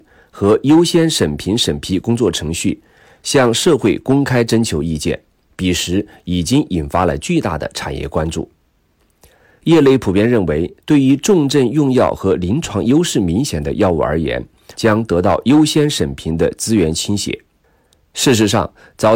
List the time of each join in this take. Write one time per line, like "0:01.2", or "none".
0:09.6
0:14.7